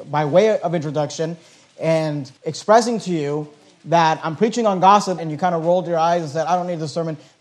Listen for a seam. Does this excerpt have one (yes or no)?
yes